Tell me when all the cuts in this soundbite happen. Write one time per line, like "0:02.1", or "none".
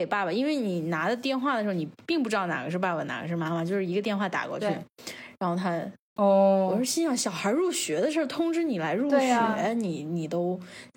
0:06.2